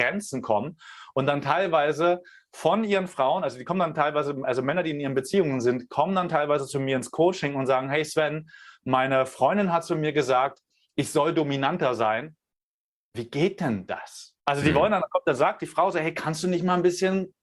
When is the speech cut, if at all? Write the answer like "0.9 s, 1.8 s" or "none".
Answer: 14.4 s